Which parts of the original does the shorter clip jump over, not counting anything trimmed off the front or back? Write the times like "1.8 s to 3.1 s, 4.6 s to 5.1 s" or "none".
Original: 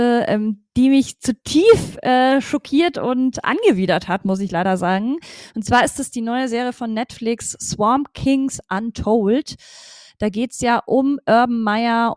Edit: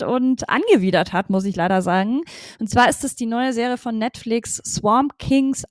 none

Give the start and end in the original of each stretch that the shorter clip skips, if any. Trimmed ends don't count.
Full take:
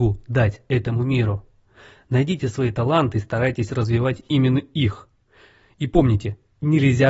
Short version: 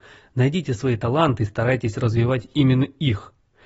none

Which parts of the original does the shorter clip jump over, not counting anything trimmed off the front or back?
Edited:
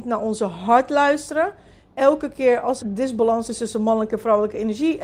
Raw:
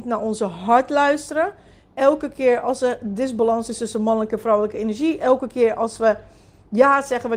2.8 s to 3.0 s

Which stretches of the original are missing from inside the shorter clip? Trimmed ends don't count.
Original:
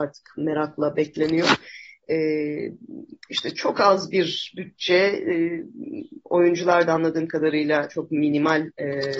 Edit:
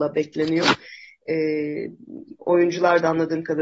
3.2 s to 6.2 s

